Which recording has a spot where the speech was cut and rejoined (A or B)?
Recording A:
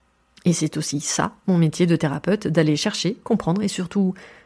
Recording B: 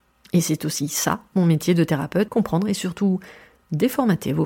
B